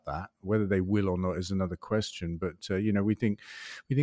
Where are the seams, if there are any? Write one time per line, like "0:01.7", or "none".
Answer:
none